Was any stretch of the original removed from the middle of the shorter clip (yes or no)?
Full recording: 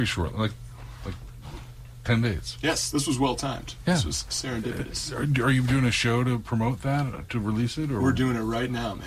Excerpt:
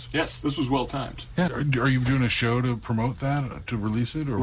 yes